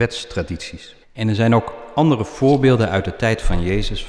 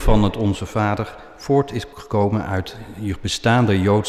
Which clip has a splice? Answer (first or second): first